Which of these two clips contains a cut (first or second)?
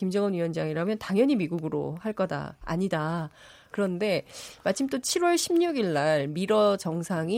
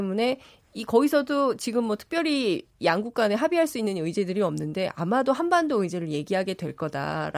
first